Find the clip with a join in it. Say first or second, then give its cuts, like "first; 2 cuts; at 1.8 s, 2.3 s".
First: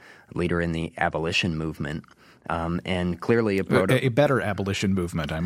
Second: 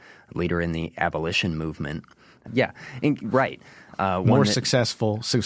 second; 1 cut; at 2.5 s